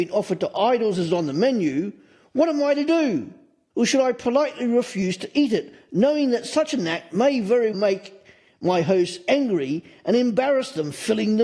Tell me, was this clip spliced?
yes; 2 cuts; at 3.7 s, 7.7 s

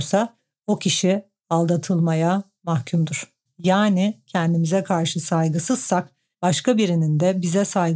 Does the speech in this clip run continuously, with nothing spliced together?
no; 1 cut; at 3.5 s

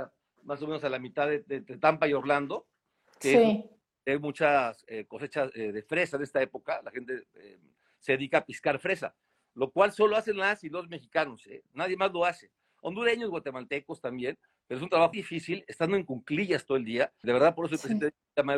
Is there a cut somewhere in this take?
yes; 2 cuts; at 15.1 s, 17.2 s

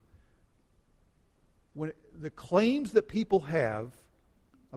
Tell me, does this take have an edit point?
no; 0 cuts

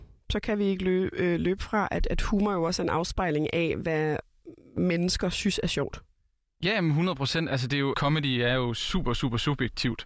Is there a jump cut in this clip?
yes; 1 cut; at 7.9 s

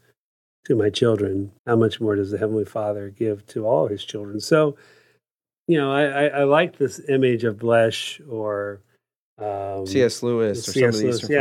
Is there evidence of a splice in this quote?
yes; 1 cut; at 1.6 s

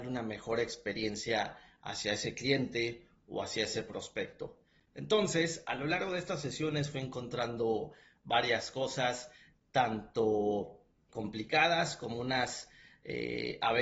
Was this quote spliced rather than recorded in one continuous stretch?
yes; 1 cut; at 11.1 s

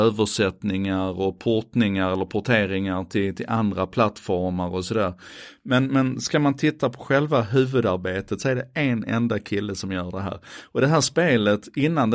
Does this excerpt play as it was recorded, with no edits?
yes; 0 cuts

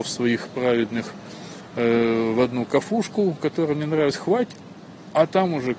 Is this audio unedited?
yes; 0 cuts

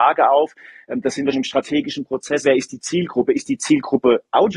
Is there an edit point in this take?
yes; 2 cuts; at 1.3 s, 2.4 s

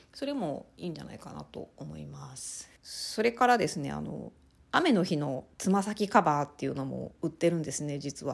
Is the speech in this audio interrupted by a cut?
yes; 2 cuts; at 2.8 s, 5.5 s

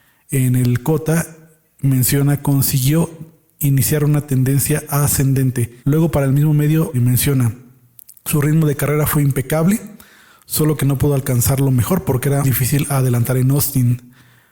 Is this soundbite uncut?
no; 3 cuts; at 5.8 s, 6.9 s, 12.4 s

